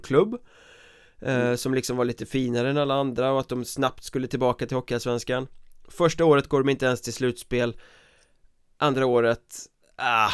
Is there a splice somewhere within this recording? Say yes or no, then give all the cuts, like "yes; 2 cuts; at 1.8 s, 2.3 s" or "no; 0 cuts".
no; 0 cuts